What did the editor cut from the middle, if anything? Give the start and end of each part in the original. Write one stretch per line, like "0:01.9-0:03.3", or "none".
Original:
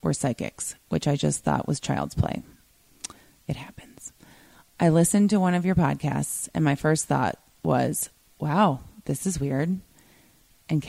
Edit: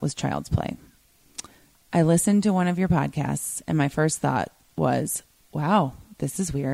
0:03.4-0:04.6

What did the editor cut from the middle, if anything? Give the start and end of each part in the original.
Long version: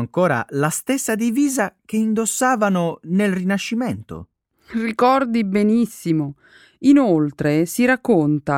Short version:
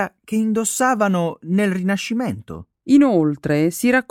0:04.4-0:06.8

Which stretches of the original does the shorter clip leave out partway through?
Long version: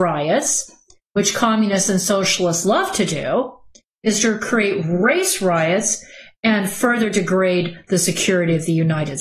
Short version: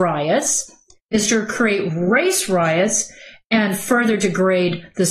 0:01.0-0:03.9

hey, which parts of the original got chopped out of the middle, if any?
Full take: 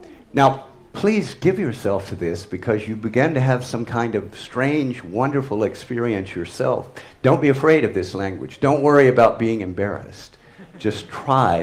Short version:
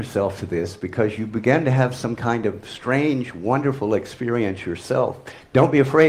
none

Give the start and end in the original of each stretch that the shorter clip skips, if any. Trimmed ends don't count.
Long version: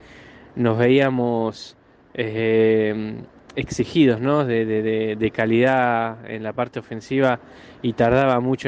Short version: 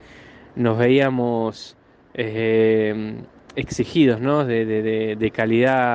none

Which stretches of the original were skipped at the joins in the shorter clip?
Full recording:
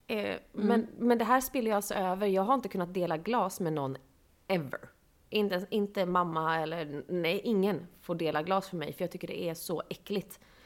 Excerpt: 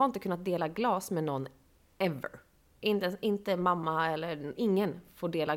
0:07.0-0:07.4

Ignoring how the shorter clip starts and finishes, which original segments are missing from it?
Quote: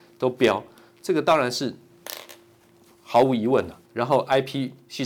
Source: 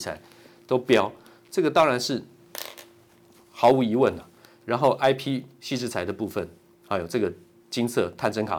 0:04.3-0:04.6

